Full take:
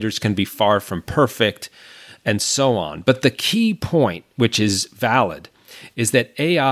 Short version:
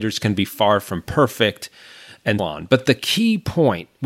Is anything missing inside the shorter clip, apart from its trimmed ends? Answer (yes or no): yes